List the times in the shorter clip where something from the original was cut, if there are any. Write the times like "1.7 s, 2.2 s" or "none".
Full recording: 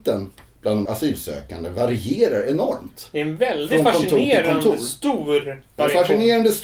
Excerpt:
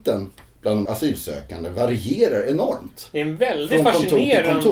none